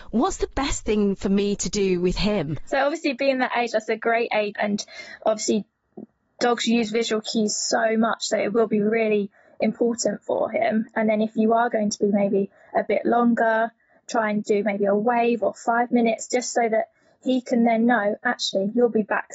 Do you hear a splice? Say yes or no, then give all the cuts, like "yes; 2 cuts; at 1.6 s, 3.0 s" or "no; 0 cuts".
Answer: yes; 1 cut; at 4.5 s